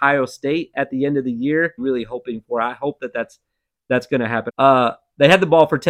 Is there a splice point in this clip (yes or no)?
yes